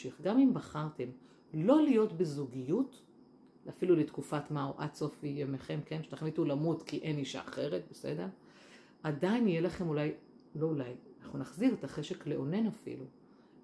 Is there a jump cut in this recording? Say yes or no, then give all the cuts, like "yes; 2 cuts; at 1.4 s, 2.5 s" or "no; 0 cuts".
no; 0 cuts